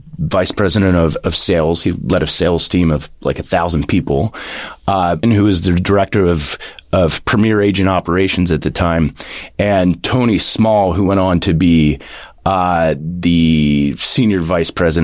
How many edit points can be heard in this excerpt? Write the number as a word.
one